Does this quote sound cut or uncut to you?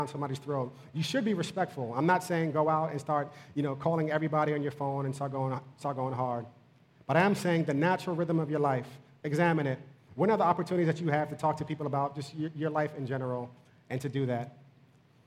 uncut